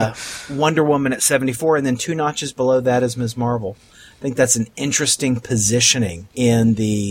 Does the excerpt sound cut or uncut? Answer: uncut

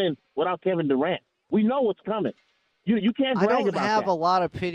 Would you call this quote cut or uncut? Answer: uncut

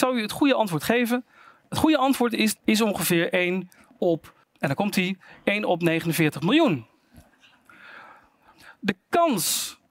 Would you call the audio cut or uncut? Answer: cut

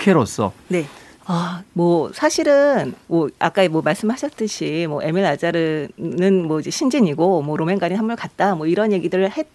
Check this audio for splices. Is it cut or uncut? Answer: cut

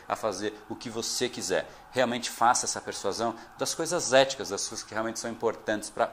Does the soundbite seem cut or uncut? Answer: uncut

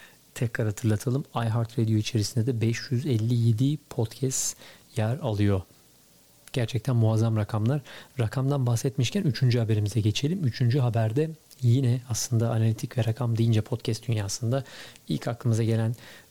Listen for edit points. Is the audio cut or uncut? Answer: uncut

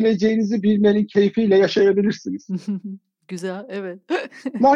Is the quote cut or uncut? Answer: uncut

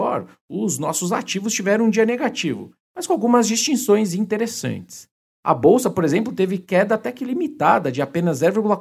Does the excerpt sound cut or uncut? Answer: uncut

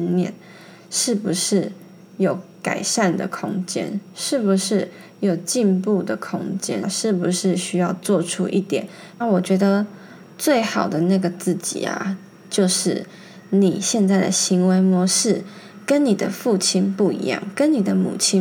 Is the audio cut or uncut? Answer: cut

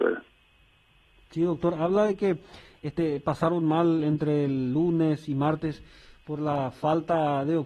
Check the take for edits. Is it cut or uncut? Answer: uncut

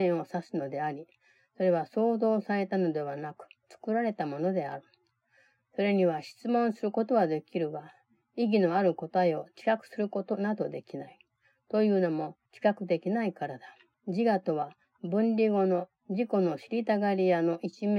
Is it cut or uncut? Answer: cut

